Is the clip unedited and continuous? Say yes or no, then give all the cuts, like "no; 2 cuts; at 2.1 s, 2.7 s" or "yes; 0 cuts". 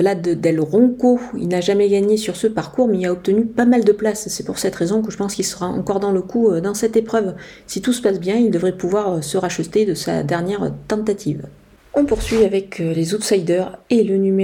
yes; 0 cuts